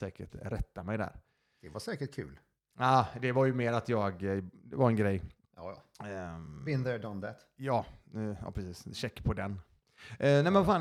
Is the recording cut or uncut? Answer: uncut